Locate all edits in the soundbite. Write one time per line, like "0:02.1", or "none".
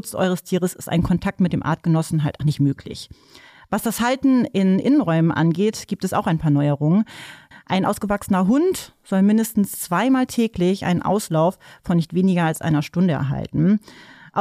0:02.4
0:07.5